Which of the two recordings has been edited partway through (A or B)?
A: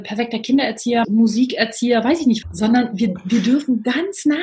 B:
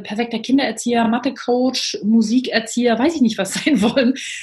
A